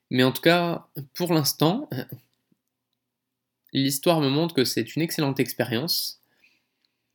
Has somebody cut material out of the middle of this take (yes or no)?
no